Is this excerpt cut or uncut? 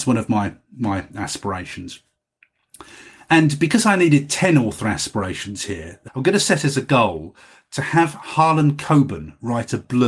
cut